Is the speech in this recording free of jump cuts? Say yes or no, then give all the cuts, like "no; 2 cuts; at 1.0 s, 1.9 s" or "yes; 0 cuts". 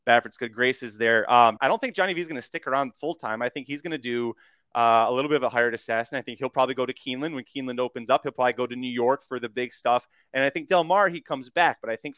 no; 1 cut; at 1.6 s